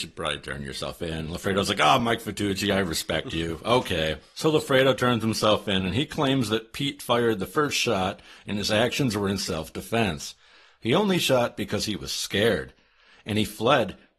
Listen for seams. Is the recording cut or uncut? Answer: uncut